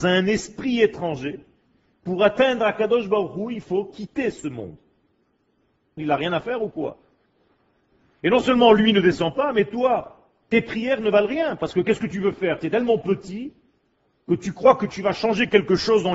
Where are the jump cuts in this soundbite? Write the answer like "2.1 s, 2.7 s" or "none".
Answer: 6.0 s